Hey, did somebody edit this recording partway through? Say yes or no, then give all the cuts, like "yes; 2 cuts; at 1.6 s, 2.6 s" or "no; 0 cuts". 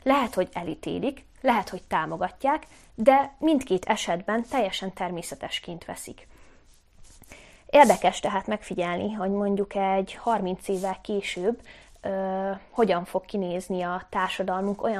no; 0 cuts